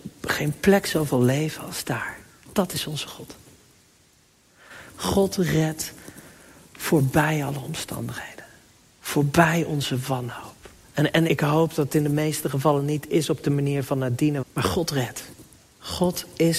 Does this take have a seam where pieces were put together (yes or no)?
yes